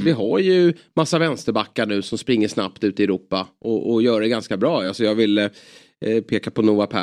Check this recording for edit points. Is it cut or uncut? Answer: uncut